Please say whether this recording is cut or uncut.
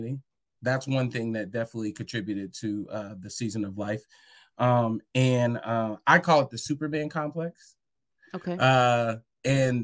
uncut